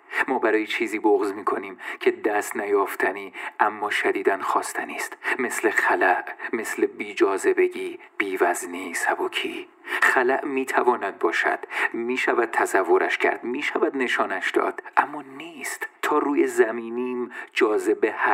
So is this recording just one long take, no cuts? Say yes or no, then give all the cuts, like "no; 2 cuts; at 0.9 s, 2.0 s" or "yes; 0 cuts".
no; 2 cuts; at 9.7 s, 16.0 s